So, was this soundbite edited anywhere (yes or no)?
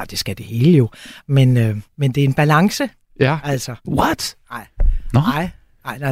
yes